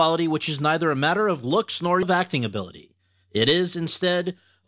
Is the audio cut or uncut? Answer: cut